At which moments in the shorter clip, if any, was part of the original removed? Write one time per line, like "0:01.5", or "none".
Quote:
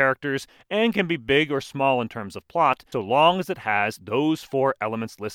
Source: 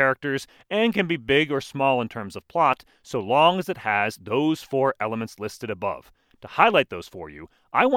0:02.9